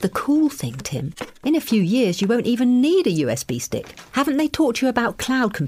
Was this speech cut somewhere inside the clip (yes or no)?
no